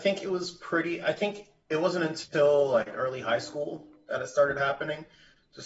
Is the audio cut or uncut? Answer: uncut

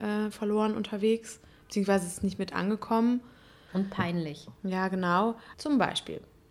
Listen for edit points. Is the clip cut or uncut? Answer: cut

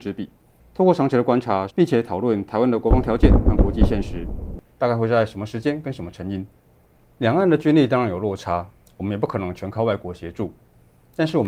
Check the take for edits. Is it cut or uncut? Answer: cut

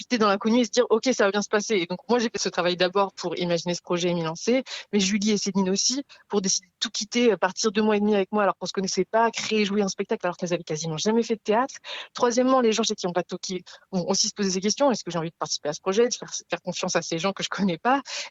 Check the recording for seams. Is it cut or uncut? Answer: uncut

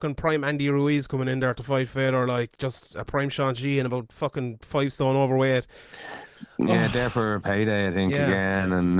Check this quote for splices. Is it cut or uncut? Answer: uncut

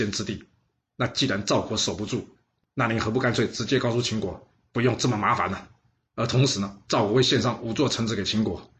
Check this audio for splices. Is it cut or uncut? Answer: cut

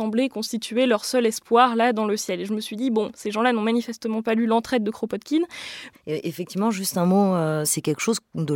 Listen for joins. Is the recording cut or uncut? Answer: cut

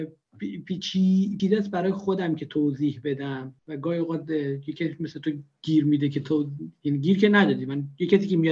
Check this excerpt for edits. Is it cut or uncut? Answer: cut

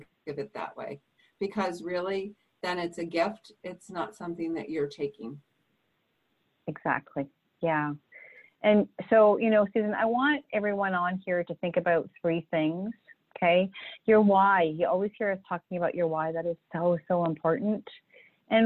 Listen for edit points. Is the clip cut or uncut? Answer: uncut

